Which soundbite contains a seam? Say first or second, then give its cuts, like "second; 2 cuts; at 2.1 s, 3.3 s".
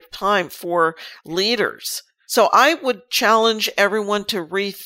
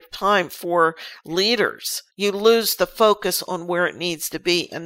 second; 1 cut; at 2.1 s